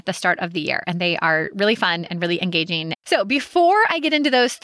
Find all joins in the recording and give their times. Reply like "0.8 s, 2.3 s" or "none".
2.9 s